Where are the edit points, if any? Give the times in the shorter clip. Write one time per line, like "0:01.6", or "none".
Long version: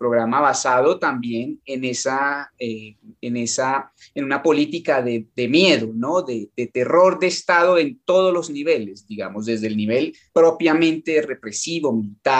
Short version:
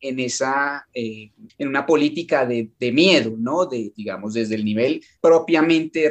0:01.5
0:03.9